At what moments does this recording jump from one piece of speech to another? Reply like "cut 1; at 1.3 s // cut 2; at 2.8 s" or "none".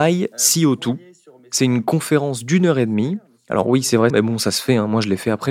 cut 1; at 4.1 s